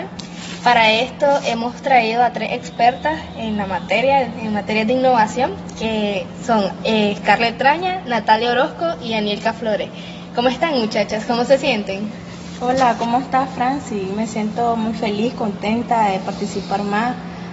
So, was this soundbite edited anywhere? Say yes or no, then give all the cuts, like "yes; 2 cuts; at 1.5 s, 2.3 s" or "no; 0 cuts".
no; 0 cuts